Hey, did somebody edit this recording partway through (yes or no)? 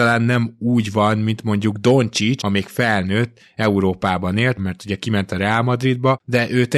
yes